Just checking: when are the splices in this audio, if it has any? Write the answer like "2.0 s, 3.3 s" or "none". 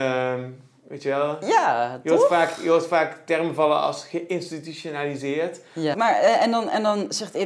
5.9 s

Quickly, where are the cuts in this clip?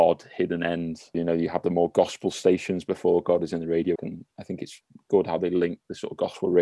1.1 s, 4.0 s

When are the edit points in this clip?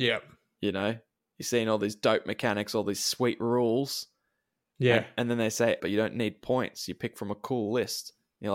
5.8 s

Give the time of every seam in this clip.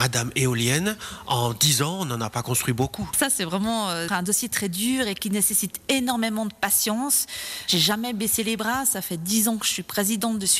4.1 s

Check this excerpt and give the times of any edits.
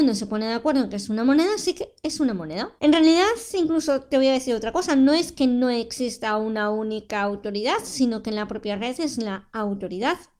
2.8 s

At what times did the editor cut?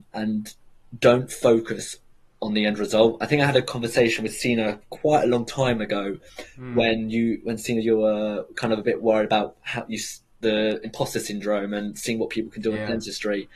none

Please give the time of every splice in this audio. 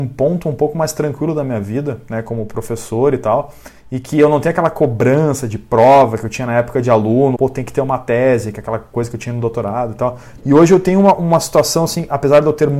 7.4 s, 10.4 s

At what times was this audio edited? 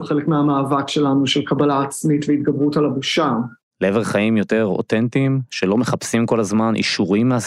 3.7 s

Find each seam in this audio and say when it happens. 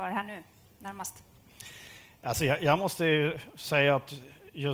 none

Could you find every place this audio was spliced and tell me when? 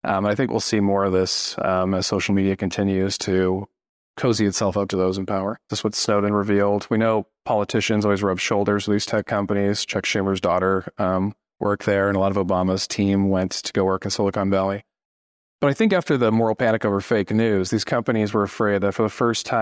5.7 s

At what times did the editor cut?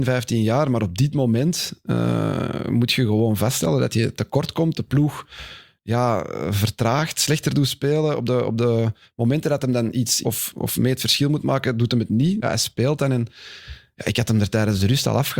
10.2 s, 12.4 s

